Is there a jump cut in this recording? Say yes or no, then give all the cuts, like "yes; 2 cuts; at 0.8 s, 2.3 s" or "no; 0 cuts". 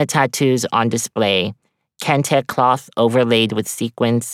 no; 0 cuts